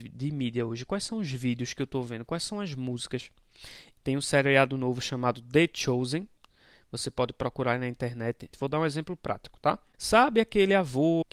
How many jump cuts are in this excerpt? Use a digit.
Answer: 2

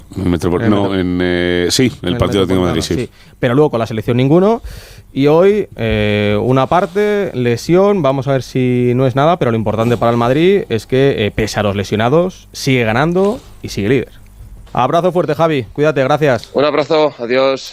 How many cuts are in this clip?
1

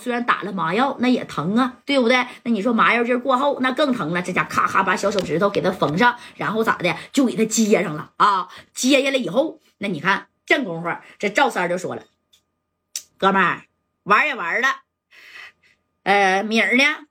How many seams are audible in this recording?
0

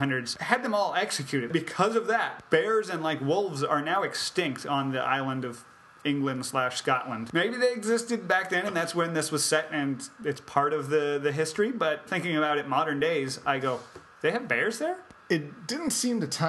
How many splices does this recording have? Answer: 2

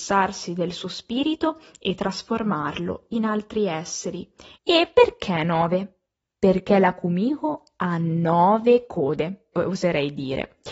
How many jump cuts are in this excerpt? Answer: 2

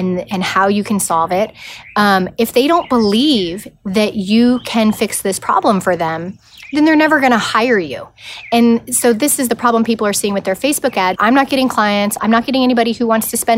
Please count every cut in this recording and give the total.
2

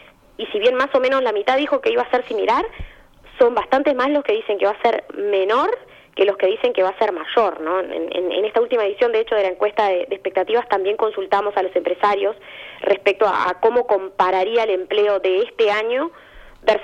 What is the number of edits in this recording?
1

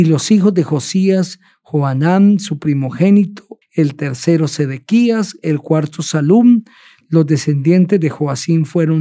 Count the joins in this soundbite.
1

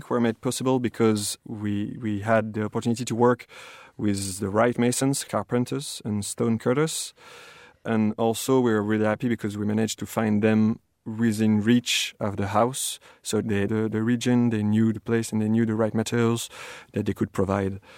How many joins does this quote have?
1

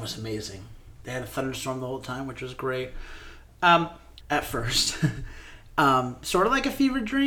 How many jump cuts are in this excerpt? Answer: 1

